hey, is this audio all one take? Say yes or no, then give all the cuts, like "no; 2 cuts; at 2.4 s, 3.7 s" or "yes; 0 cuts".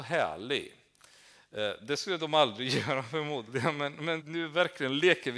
no; 1 cut; at 4.2 s